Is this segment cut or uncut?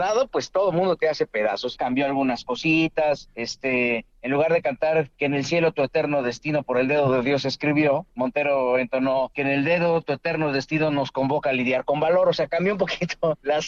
cut